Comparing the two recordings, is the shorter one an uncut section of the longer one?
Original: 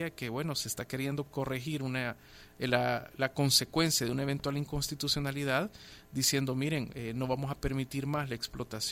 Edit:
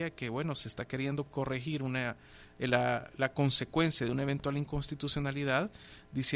yes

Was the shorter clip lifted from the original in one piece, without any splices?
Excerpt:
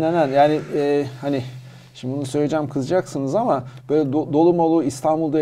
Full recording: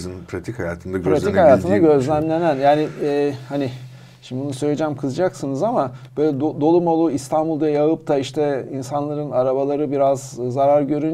yes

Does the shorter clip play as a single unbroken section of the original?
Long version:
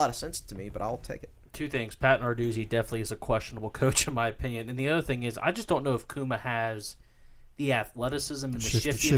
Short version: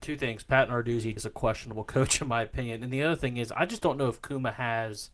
no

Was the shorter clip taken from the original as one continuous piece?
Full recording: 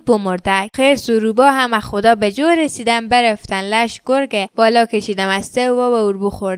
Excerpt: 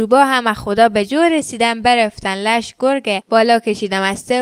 yes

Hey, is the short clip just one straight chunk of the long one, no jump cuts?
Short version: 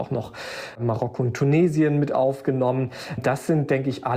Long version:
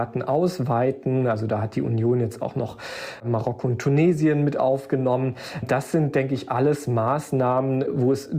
yes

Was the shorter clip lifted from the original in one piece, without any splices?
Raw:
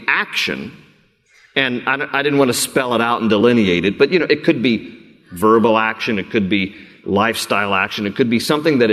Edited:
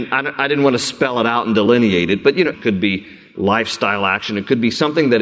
no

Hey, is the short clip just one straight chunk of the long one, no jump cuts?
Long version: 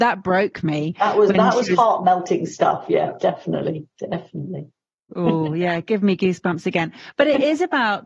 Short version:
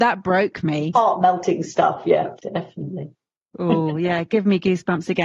no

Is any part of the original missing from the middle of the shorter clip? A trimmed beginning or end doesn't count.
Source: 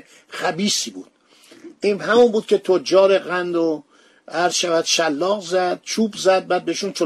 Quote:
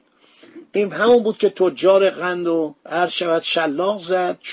yes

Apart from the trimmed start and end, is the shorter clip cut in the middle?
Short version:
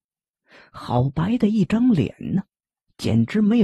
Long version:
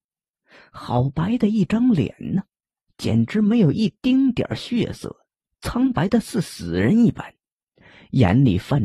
no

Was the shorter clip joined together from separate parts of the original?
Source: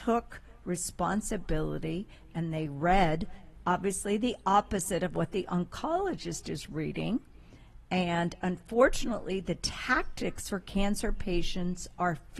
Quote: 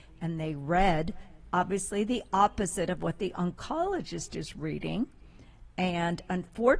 no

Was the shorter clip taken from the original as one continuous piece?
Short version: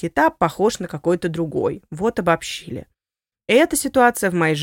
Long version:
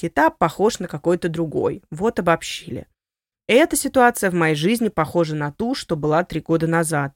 yes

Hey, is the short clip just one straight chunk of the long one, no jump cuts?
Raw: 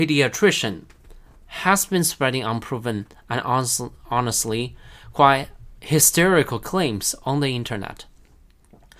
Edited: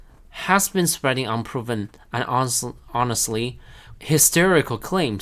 no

